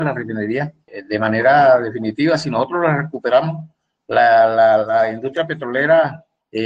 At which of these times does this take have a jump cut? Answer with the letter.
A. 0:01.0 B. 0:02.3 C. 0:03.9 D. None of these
D